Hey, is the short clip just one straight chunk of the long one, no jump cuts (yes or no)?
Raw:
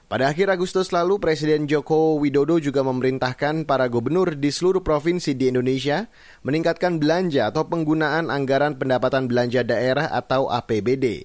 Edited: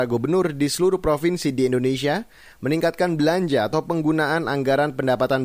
yes